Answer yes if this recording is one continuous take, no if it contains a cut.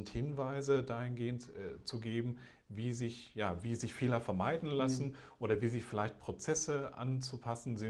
yes